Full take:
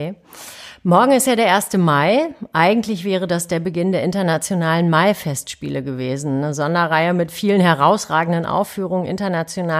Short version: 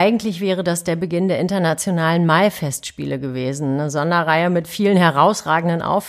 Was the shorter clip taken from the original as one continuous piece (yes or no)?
yes